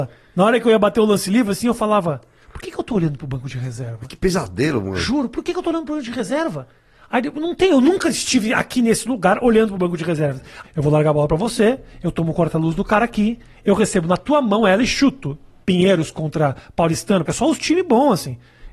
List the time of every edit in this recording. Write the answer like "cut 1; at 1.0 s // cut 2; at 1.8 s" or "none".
cut 1; at 10.6 s // cut 2; at 15.6 s // cut 3; at 17.3 s